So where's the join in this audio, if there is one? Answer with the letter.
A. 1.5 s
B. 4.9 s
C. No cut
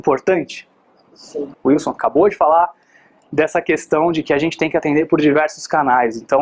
A